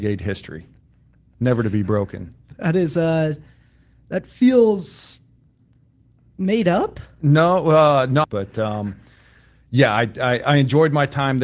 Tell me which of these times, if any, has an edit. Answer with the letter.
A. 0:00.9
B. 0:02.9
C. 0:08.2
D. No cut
C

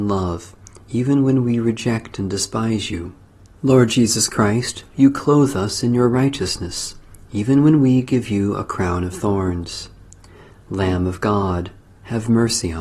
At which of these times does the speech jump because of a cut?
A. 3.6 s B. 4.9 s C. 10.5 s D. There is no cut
A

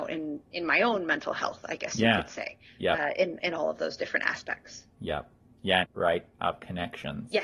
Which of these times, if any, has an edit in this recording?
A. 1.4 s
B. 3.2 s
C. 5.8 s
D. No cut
C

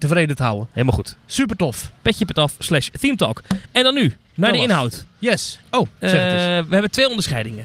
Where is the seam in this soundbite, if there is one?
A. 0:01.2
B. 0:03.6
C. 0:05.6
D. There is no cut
C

